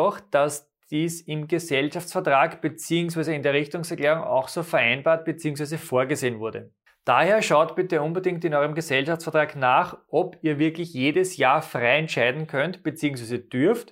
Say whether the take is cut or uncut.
uncut